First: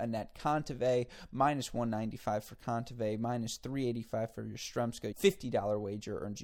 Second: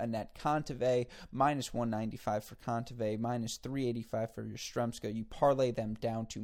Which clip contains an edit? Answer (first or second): first